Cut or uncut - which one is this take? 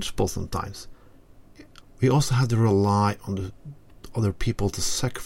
cut